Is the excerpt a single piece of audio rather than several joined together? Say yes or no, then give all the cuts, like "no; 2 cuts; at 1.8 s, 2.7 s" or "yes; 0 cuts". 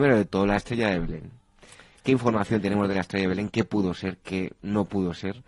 yes; 0 cuts